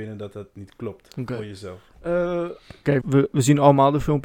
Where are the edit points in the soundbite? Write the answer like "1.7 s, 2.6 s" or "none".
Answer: 3.0 s